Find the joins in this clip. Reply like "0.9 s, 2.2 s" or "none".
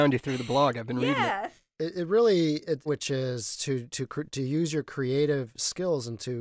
2.9 s

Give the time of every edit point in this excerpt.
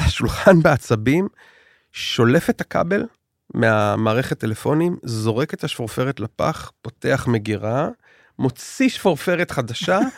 none

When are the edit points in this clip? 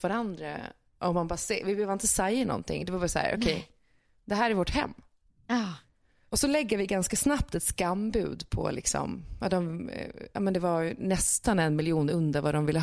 none

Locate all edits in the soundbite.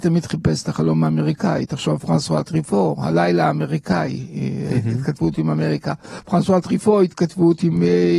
none

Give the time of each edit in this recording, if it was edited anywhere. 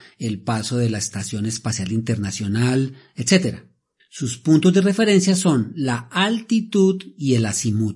none

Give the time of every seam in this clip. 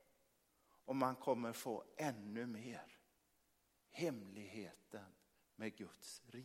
none

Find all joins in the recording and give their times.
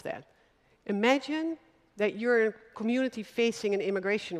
none

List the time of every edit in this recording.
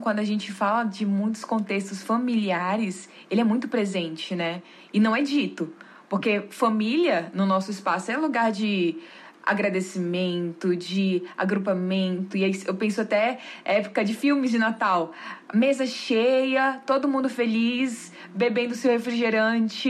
none

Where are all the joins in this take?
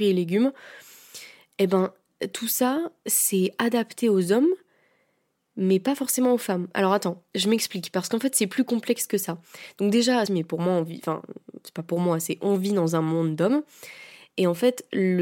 10.3 s

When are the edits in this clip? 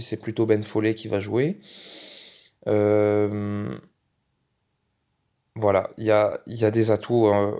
none

